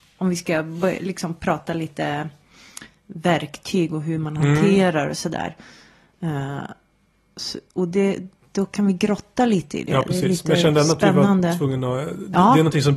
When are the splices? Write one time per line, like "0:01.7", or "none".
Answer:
none